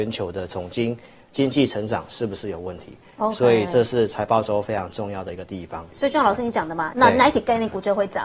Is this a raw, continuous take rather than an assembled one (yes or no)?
no